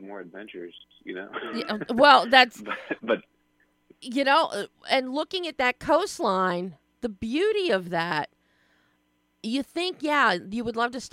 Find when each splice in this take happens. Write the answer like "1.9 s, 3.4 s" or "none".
none